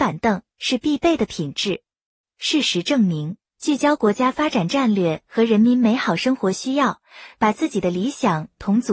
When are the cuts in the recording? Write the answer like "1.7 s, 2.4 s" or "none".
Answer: 2.2 s